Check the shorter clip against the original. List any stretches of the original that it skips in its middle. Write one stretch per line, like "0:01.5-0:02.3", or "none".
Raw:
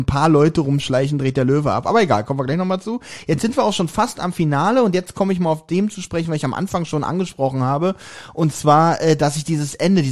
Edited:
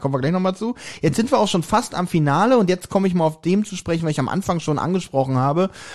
none